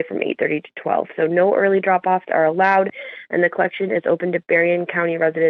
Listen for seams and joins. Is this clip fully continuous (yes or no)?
yes